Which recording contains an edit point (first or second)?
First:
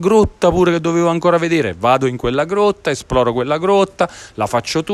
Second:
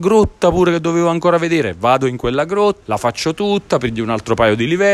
second